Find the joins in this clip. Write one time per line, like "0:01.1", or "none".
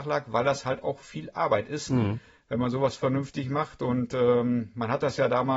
none